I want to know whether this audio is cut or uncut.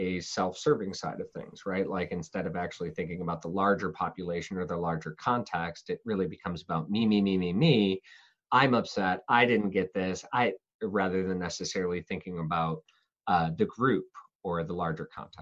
uncut